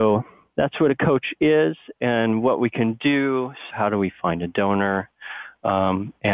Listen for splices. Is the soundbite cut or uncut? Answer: cut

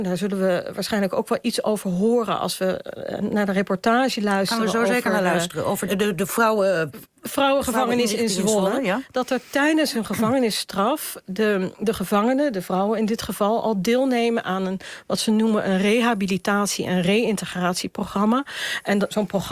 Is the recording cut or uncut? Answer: cut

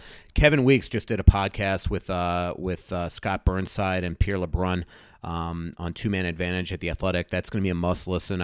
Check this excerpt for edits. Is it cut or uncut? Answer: uncut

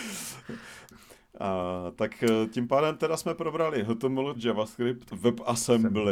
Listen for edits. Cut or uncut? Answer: cut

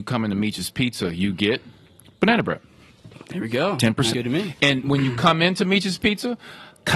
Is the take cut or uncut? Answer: cut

